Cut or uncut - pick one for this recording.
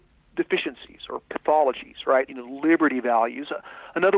cut